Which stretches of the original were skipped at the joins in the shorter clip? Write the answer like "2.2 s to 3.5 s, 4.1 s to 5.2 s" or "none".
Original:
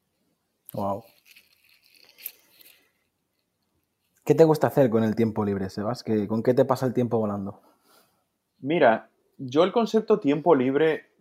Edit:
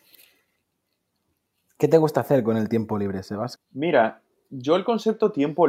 6.0 s to 8.4 s